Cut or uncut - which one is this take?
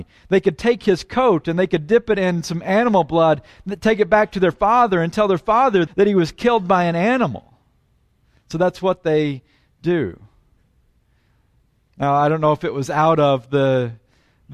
cut